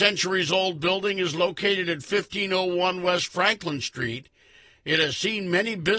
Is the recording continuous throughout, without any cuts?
yes; 0 cuts

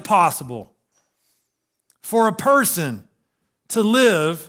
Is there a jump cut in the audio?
no; 0 cuts

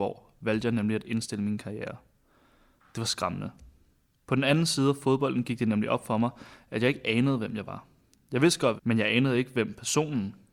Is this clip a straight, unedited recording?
no; 1 cut; at 8.8 s

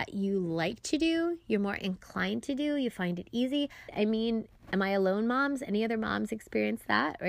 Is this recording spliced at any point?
yes; 1 cut; at 3.9 s

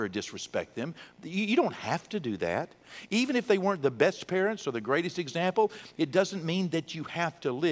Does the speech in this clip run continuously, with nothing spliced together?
no; 1 cut; at 6.0 s

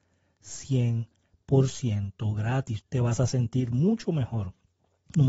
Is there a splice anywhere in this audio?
yes; 1 cut; at 2.8 s

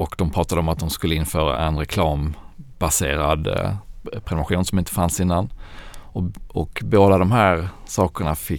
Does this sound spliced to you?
no; 0 cuts

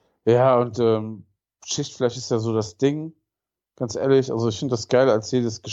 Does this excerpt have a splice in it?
no; 0 cuts

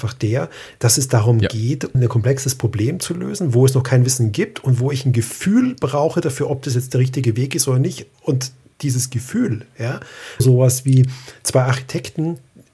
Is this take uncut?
no; 2 cuts; at 1.9 s, 10.4 s

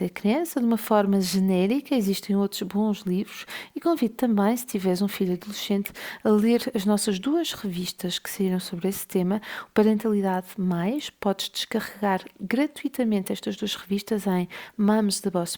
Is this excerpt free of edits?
yes; 0 cuts

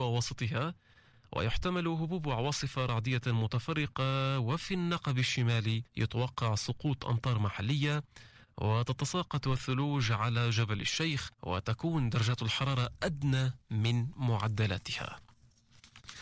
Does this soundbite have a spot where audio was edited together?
yes; 2 cuts; at 5.9 s, 11.3 s

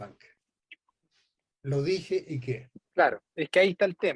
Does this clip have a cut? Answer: yes; 1 cut; at 2.8 s

